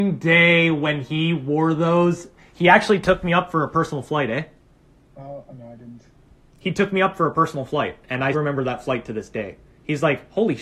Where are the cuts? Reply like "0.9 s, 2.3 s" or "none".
5.1 s, 8.3 s